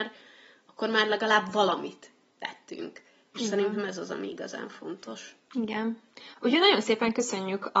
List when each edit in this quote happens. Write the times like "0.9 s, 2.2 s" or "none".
none